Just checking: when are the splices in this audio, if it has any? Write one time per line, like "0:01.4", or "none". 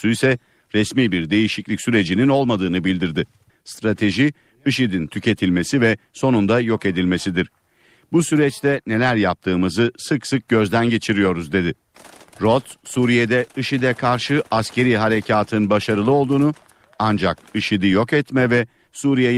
0:03.5